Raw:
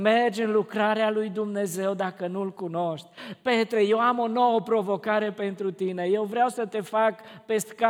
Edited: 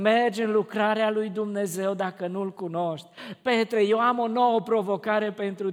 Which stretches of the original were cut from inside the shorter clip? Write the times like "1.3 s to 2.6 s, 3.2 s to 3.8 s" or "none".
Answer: none